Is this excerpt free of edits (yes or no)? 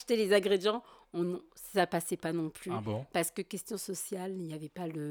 yes